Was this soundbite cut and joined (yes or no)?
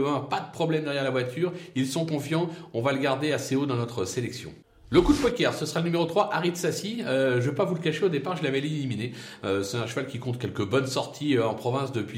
no